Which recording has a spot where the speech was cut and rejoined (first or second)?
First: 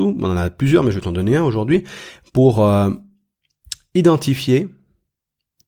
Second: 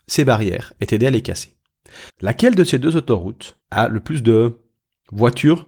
second